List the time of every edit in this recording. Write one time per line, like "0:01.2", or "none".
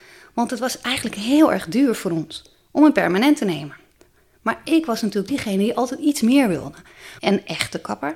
0:07.2